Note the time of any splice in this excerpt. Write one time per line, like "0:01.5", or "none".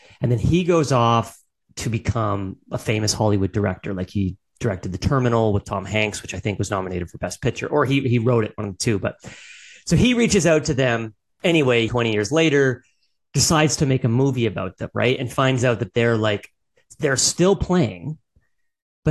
0:11.9